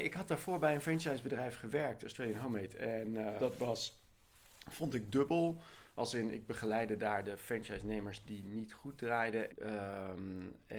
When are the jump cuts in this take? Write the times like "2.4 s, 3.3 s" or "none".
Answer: 3.4 s, 9.5 s